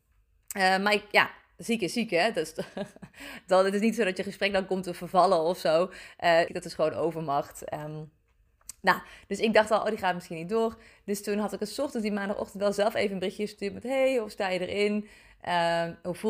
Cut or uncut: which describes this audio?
cut